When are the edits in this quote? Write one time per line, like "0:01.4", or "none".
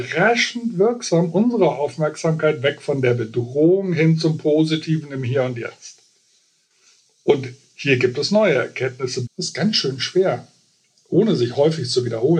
0:09.3